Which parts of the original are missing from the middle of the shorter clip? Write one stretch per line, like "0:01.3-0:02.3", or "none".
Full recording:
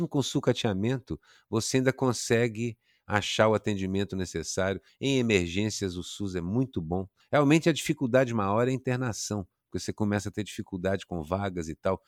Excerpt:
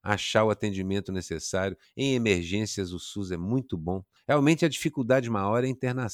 none